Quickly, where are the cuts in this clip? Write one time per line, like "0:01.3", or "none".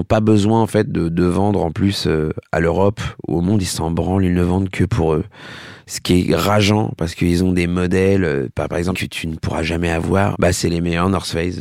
0:08.9
0:10.3